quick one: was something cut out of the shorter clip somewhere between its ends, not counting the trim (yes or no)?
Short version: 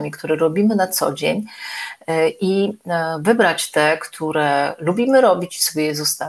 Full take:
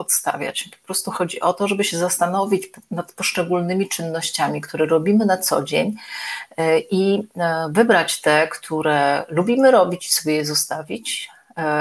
no